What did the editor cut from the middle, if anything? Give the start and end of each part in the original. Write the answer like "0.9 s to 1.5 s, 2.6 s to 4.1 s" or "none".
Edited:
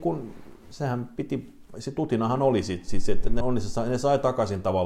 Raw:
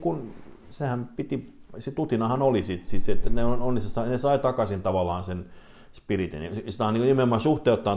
3.4 s to 3.6 s